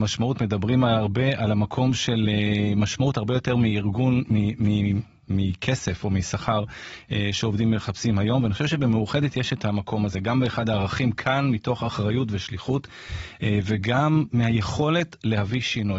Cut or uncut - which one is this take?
uncut